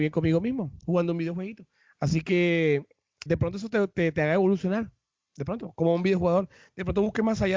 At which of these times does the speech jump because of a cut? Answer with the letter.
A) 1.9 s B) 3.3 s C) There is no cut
B